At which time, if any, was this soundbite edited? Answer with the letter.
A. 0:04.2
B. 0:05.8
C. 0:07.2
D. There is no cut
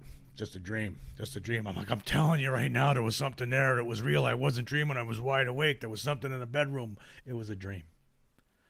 C